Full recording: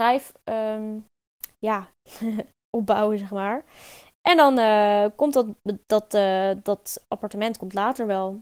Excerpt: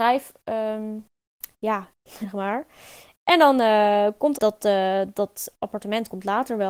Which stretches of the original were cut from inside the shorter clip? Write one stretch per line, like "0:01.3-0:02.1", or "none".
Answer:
0:02.2-0:03.2
0:05.3-0:05.8